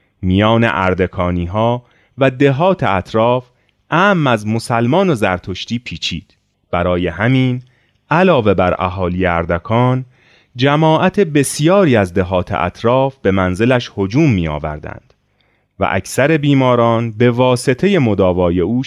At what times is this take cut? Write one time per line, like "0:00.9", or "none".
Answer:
0:06.5